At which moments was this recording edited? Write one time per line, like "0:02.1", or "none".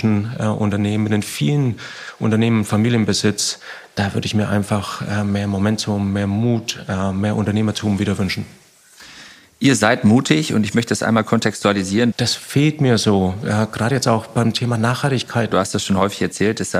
0:12.1
0:15.5